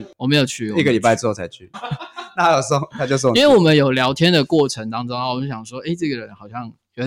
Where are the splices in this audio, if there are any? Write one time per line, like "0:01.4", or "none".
0:01.7